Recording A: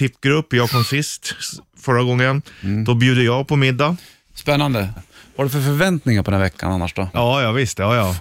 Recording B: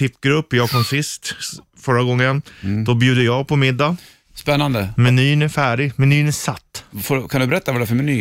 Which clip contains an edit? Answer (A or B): A